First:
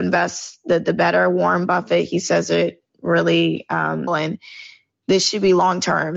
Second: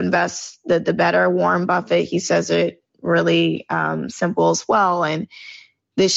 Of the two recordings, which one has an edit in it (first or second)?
first